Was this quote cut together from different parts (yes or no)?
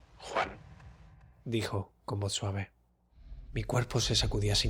yes